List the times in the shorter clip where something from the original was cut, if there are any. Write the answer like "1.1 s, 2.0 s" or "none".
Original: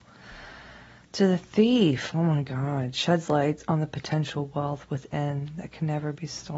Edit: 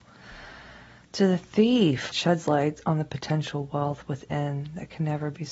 2.1 s